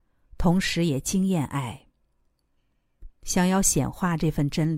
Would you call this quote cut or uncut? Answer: cut